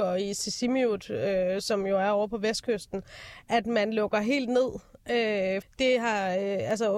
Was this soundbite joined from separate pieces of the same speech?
yes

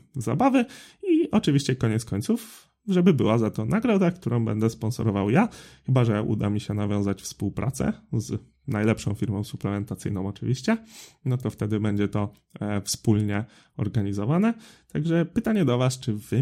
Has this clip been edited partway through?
no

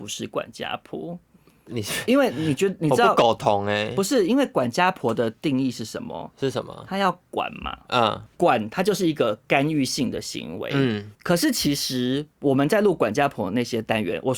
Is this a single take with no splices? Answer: yes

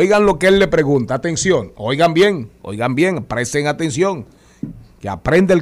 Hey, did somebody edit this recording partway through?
no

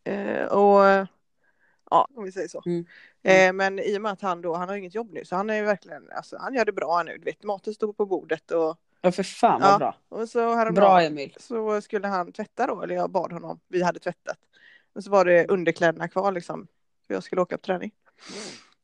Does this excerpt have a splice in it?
yes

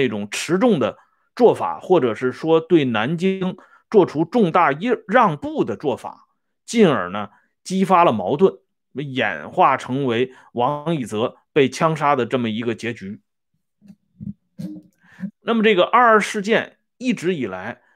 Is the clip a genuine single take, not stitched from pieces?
no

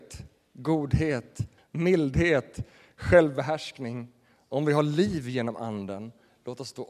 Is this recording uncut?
no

